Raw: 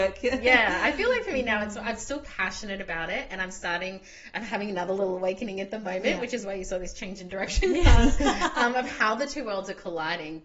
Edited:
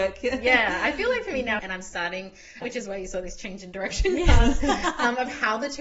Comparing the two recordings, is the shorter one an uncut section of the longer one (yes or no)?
no